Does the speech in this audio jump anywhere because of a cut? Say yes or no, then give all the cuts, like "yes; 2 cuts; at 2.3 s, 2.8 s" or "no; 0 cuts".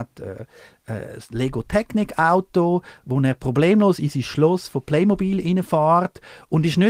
no; 0 cuts